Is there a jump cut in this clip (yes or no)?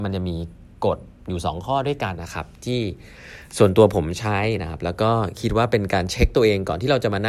yes